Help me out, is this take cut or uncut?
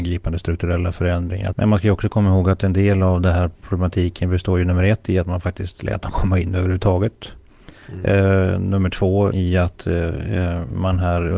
cut